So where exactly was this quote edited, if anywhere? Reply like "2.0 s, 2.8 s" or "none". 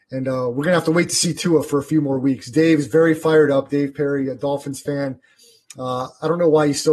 none